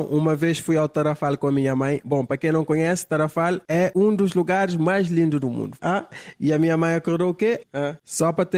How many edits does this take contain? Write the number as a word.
two